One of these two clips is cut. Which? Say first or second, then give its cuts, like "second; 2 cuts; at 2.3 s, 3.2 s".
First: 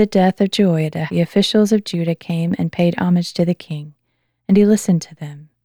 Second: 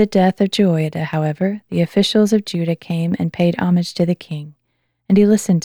first; 1 cut; at 1.1 s